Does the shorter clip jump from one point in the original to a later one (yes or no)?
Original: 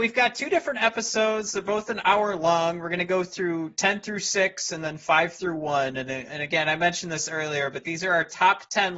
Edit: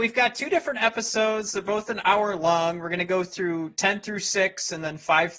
no